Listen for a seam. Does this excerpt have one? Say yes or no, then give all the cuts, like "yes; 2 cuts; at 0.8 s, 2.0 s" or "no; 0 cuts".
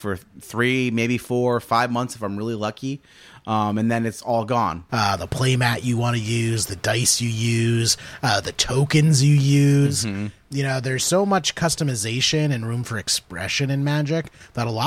yes; 1 cut; at 4.9 s